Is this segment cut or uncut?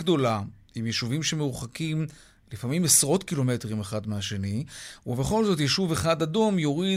uncut